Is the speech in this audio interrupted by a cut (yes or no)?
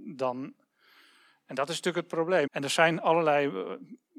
yes